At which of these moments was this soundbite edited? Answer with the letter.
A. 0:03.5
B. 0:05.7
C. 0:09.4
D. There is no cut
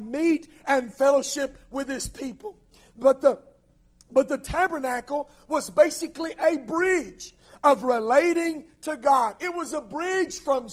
D